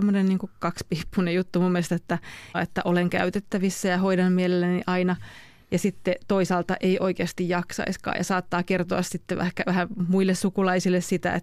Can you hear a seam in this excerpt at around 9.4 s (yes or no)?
no